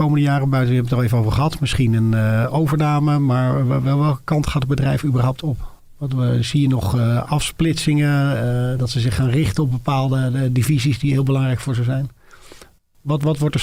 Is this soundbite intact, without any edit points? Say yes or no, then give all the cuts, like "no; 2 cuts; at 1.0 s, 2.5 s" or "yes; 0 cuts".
yes; 0 cuts